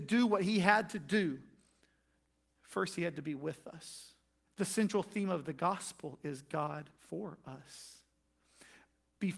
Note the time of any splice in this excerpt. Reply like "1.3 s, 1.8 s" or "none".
4.4 s, 7.0 s

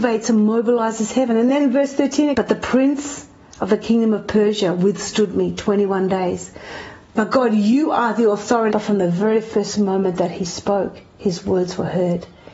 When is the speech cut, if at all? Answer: 2.3 s, 7.1 s, 8.7 s

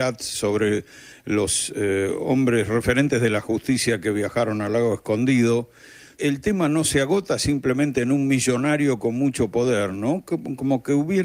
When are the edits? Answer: 6.2 s

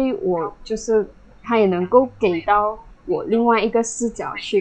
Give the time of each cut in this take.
1.4 s

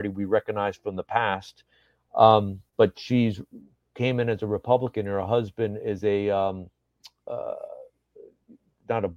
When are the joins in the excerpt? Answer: none

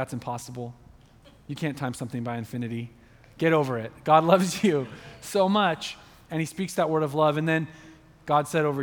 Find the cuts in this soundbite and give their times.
none

